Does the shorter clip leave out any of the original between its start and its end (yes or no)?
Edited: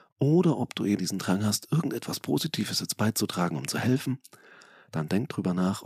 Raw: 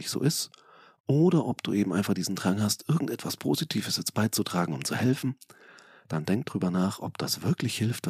yes